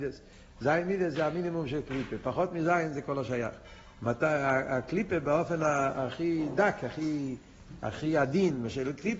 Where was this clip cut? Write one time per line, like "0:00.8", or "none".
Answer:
none